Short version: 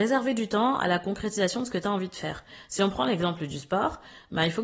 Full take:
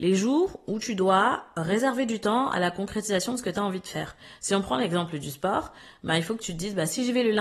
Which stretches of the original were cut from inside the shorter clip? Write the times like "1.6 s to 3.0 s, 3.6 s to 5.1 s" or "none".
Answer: none

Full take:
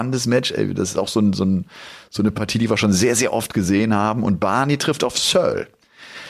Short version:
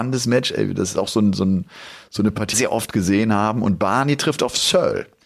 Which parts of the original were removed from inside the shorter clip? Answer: 2.5 s to 3.1 s

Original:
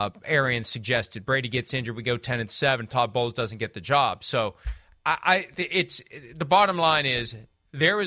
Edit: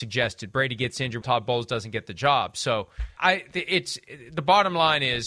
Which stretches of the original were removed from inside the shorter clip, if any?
1.9 s to 2.9 s, 4.8 s to 5.2 s

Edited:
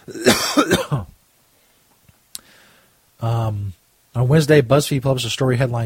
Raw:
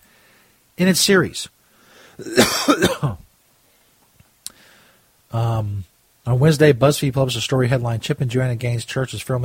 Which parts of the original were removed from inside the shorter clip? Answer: none

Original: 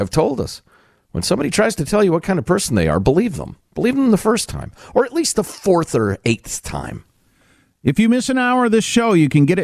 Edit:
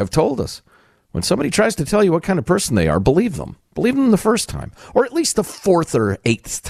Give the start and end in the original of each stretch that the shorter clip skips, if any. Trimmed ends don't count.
none

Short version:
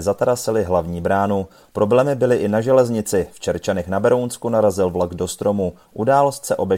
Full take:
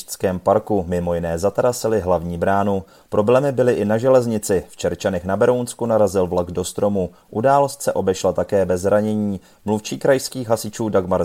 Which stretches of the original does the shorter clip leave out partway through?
none

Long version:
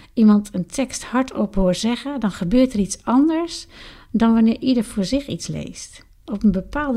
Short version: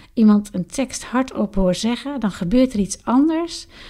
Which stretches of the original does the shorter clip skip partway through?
none

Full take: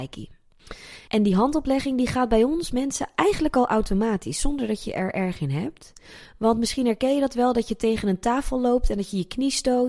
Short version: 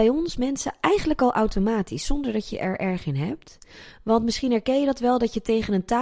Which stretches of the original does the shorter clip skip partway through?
none

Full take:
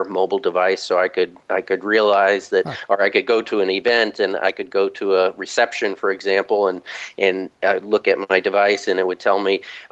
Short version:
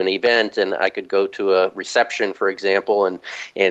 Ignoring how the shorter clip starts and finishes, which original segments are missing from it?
none

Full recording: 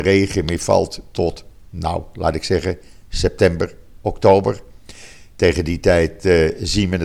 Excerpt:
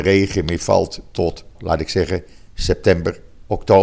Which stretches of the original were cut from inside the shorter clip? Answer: 1.5 s to 2.1 s

